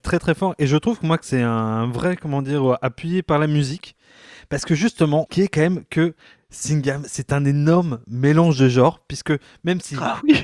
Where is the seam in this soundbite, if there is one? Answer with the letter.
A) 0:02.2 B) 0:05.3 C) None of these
B